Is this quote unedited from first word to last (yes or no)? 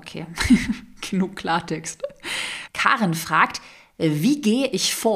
no